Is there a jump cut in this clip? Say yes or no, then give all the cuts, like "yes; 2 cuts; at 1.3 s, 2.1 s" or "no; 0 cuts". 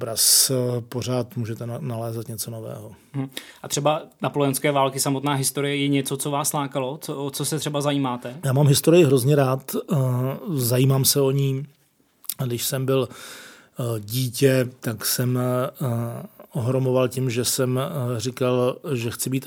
no; 0 cuts